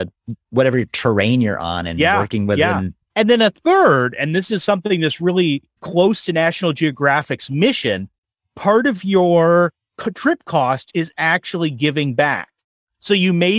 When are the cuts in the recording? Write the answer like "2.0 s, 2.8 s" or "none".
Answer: 3.1 s, 5.8 s